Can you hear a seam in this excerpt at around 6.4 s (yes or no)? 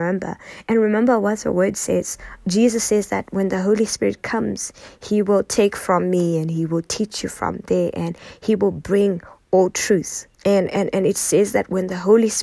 no